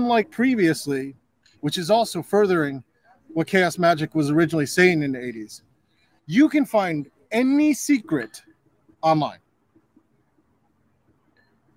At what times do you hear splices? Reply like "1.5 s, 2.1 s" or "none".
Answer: 1.5 s